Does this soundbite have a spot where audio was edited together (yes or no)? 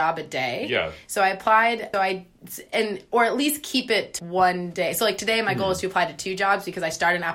yes